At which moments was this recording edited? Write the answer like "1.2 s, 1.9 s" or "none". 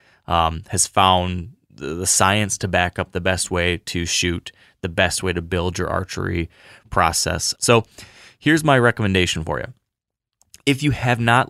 7.5 s